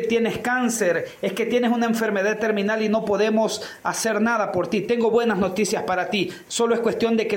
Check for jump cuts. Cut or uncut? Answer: cut